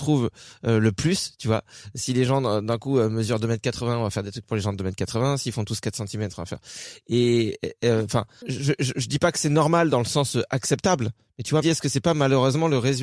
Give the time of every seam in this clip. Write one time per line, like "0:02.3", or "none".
0:08.4
0:11.6